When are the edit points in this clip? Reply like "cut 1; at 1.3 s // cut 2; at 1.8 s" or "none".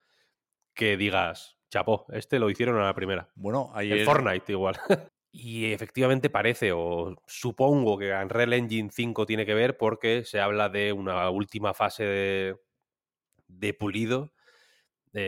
cut 1; at 5.1 s